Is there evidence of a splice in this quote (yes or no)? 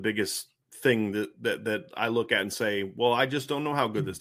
no